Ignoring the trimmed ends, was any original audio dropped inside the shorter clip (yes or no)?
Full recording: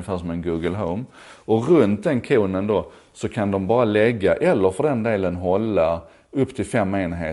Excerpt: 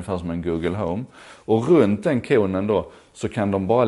no